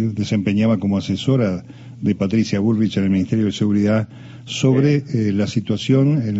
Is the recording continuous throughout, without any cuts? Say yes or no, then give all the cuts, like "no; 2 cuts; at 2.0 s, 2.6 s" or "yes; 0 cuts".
yes; 0 cuts